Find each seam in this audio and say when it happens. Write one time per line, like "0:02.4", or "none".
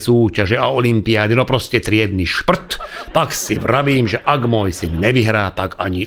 none